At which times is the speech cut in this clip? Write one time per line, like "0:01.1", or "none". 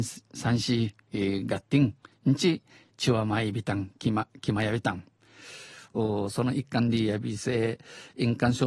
0:05.9